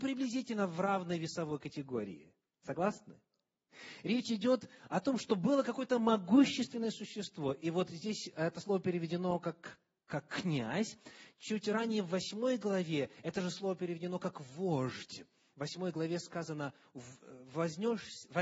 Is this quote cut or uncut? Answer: uncut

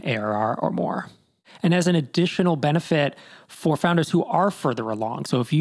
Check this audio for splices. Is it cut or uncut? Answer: uncut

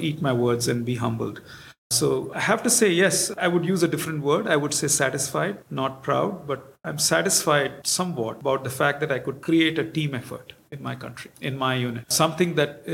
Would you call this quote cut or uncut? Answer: uncut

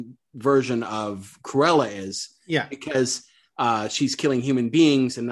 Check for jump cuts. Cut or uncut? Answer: uncut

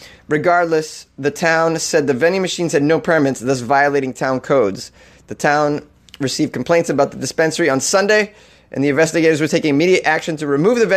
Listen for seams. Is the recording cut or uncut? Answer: uncut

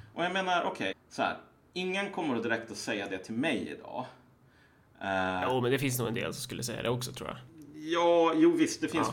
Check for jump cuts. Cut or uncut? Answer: cut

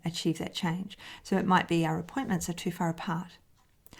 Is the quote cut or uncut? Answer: uncut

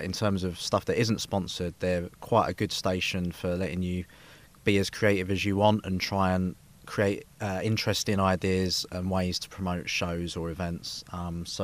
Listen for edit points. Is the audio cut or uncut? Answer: uncut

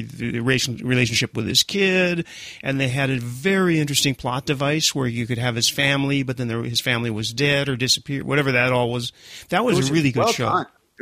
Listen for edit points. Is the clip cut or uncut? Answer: uncut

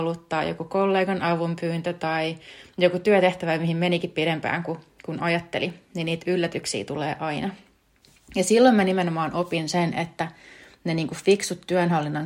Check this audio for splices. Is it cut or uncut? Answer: uncut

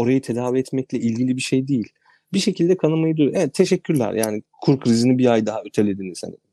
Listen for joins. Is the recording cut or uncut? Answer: uncut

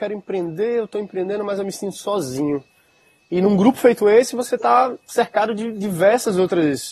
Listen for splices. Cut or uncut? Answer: uncut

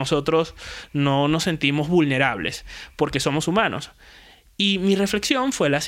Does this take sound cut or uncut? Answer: uncut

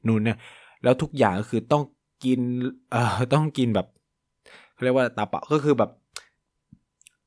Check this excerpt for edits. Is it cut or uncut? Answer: uncut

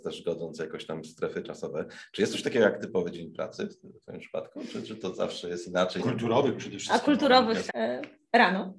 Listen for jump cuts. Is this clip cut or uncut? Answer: cut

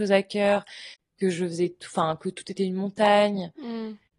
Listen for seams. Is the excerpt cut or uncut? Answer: uncut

